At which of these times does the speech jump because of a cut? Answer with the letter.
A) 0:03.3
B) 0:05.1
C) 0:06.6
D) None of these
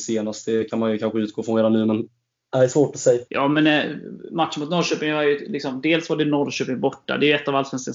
A